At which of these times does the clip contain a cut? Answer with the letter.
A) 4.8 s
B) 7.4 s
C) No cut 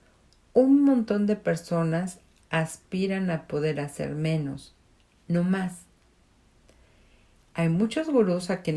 B